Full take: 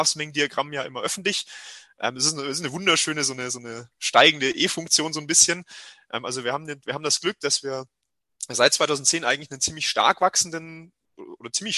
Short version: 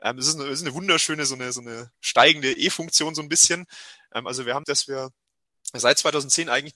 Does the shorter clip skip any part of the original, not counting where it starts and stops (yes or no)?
yes